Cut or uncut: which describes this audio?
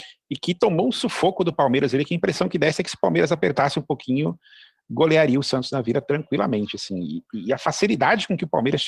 uncut